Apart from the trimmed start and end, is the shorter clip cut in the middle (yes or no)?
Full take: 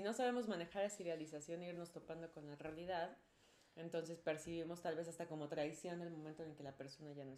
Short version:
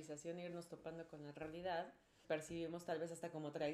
yes